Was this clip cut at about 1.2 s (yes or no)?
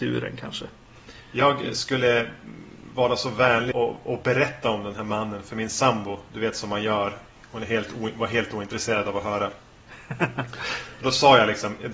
no